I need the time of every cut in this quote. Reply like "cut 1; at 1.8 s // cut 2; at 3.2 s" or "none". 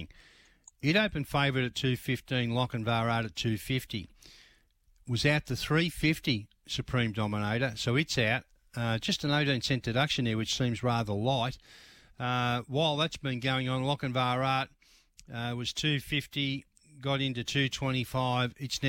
none